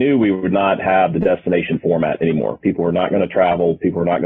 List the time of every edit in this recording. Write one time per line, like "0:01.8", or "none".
0:02.6